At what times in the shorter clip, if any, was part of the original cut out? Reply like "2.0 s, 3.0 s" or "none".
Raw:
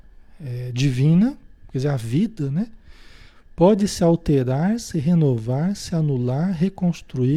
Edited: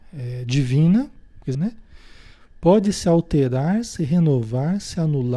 1.5 s

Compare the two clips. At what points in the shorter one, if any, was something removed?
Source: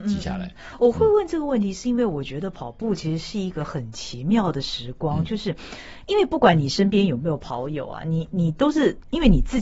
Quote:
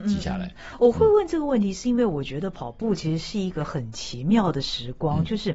none

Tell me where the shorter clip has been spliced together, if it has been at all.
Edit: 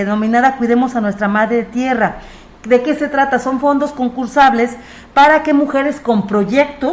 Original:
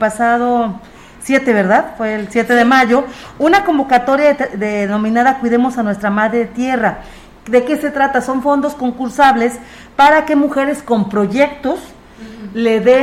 none

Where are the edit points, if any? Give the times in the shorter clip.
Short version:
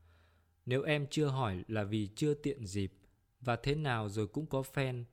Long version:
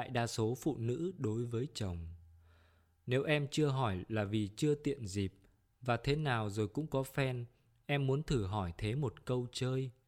none

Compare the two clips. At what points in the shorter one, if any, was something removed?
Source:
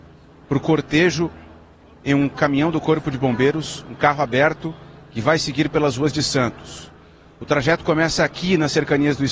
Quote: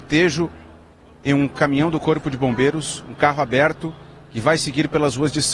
none

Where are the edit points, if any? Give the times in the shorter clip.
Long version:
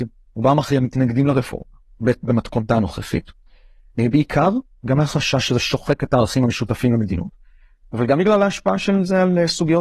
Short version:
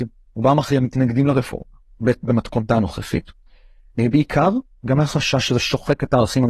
none

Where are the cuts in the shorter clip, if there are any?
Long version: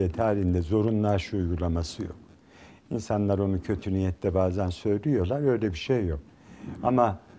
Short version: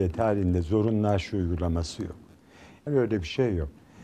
2.9 s

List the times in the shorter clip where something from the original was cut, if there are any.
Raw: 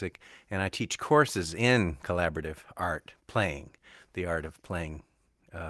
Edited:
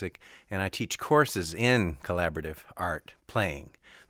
none

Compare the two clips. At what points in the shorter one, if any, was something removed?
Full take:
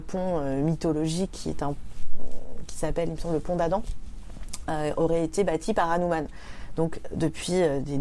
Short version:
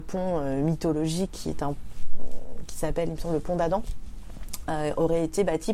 none

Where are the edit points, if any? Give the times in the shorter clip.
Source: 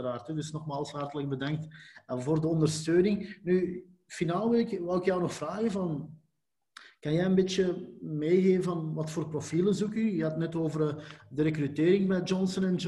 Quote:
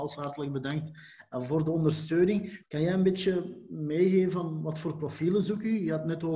2.6 s

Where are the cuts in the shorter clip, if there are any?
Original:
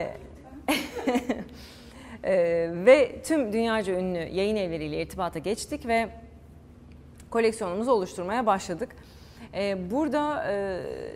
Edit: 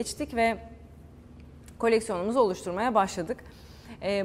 none

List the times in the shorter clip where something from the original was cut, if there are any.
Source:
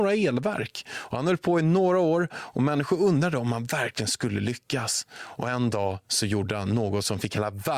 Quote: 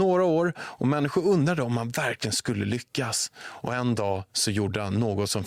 none

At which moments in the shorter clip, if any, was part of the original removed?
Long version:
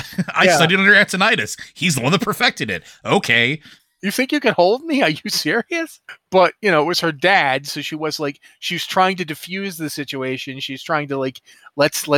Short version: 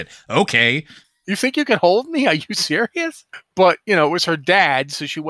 none

